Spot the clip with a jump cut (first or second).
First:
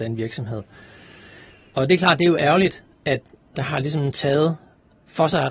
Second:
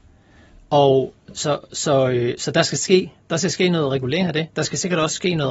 first